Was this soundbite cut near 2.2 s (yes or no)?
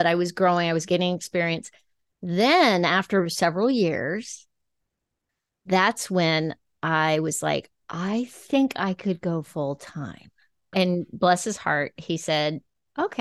no